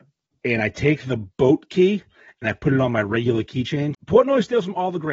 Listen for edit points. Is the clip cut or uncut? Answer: cut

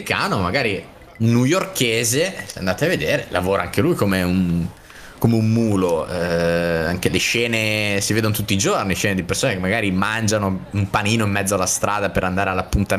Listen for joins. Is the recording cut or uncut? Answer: uncut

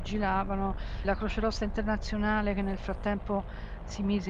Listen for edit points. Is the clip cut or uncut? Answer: cut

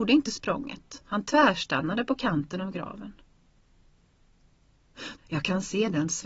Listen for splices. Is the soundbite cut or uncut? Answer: cut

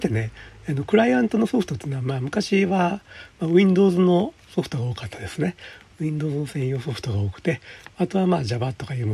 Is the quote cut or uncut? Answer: uncut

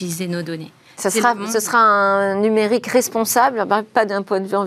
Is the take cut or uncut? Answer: uncut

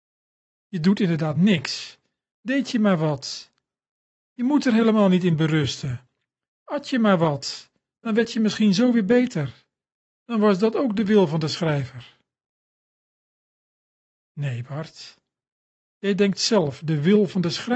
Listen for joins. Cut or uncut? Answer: uncut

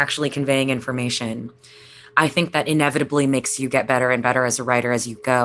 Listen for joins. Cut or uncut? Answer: uncut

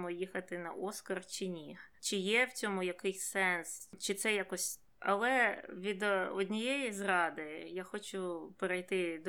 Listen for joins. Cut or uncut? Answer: cut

